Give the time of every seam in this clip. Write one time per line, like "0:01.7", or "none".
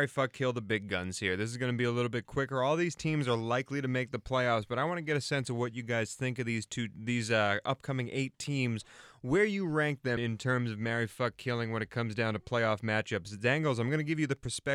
0:10.2